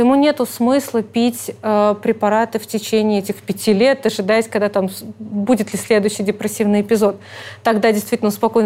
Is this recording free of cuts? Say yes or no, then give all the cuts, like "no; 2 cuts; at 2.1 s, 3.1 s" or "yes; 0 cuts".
yes; 0 cuts